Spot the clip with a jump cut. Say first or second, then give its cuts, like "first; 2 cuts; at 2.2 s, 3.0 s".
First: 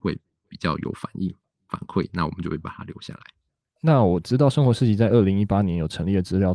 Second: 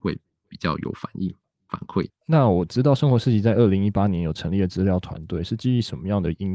second; 1 cut; at 2.1 s